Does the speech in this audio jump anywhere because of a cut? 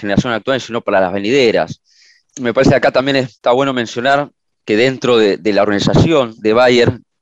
yes; 1 cut; at 2.2 s

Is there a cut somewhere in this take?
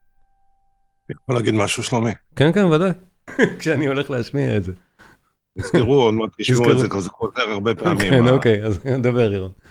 yes; 1 cut; at 3.3 s

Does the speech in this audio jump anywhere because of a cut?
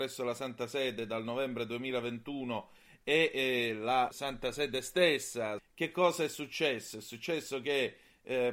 yes; 2 cuts; at 4.1 s, 5.6 s

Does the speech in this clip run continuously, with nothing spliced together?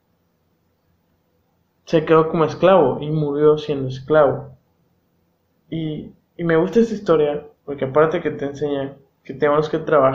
no; 2 cuts; at 5.6 s, 7.6 s

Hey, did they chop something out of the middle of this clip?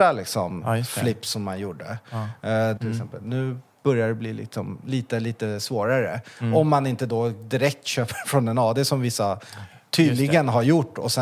yes; 1 cut; at 2.8 s

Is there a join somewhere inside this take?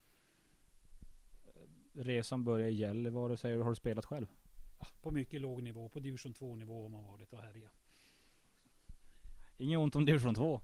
no; 0 cuts

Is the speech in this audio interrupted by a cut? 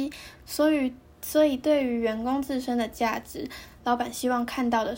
no; 0 cuts

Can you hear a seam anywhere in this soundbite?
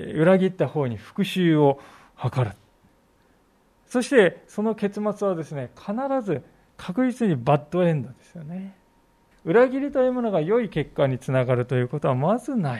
yes; 1 cut; at 9.3 s

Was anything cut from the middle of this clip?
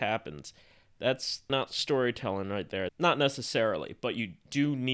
yes; 2 cuts; at 1.5 s, 2.9 s

